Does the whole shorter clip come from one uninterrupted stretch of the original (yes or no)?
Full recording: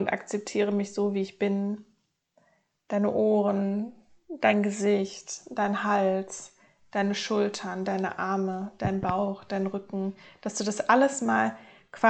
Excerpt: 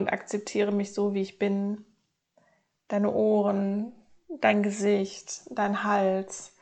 yes